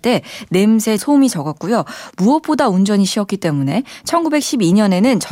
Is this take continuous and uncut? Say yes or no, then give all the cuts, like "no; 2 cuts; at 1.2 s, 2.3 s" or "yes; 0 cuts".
no; 1 cut; at 1.0 s